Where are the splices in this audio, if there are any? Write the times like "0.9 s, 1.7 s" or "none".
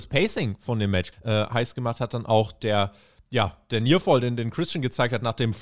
1.1 s

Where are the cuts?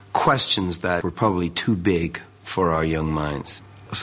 1.0 s

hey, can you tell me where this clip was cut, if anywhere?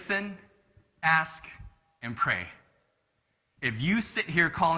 3.6 s

